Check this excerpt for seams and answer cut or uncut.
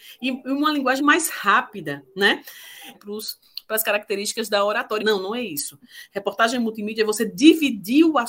cut